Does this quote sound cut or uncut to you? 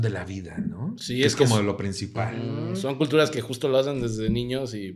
uncut